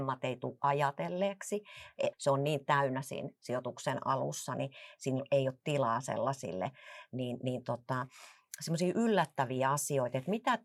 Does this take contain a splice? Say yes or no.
yes